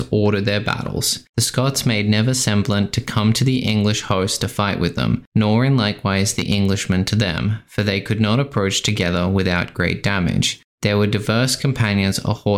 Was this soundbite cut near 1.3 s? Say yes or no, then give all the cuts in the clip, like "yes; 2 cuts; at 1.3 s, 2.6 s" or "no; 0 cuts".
yes; 1 cut; at 1.3 s